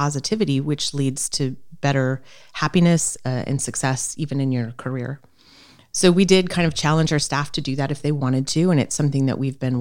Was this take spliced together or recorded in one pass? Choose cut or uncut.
uncut